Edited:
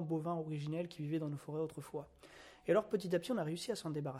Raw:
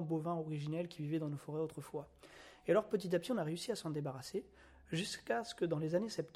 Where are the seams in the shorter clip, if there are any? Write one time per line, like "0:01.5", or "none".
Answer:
none